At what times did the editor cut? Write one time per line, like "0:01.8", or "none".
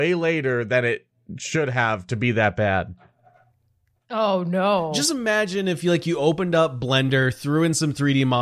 none